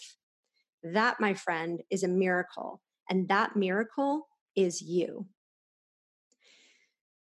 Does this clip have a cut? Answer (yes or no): no